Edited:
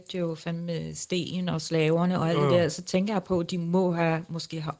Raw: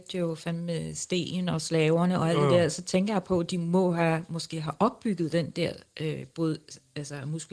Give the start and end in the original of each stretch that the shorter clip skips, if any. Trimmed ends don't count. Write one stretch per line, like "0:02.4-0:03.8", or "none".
none

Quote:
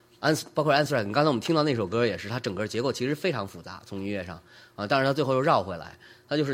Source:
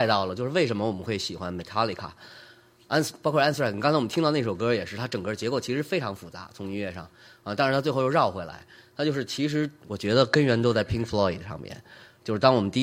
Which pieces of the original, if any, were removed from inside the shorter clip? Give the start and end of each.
none

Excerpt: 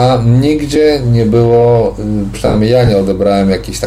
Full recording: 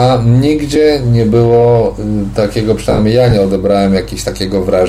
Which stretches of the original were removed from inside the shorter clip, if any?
0:02.3-0:02.8

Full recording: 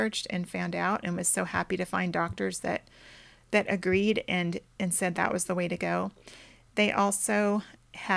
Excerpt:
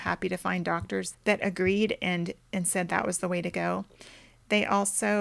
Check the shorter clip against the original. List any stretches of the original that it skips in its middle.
0:02.6-0:03.4

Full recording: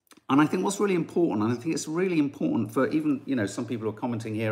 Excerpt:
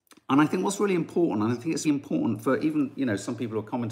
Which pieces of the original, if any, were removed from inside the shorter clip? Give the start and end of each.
0:01.8-0:02.1

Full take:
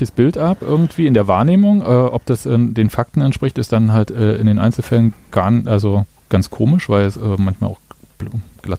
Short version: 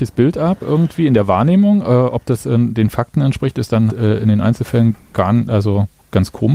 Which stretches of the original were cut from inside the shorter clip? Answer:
0:03.9-0:04.1

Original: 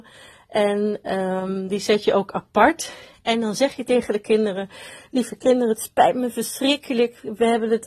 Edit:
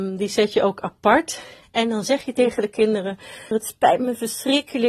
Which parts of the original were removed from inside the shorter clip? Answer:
0:05.0-0:05.7

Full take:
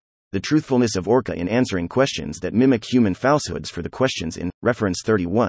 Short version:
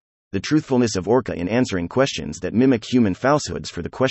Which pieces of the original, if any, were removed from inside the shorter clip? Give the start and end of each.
none

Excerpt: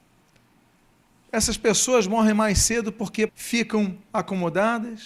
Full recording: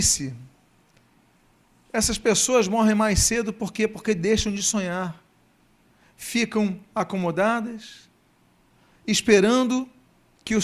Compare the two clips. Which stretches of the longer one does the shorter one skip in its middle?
0:03.9-0:06.1

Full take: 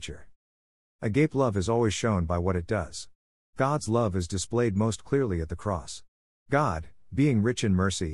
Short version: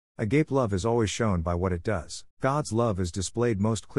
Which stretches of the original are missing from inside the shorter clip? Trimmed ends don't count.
0:03.1-0:03.5

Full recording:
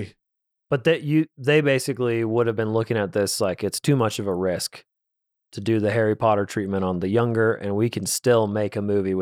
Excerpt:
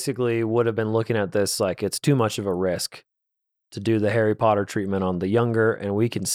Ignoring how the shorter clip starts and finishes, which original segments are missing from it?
none

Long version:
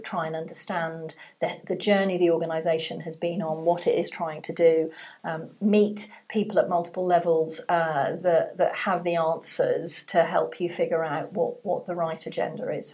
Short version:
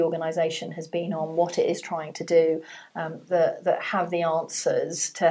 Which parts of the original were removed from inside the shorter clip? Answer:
0:05.6-0:08.2

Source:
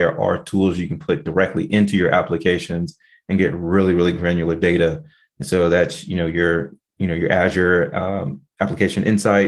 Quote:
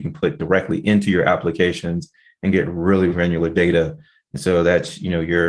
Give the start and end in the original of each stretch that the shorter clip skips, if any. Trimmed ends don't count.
0:04.0-0:04.2

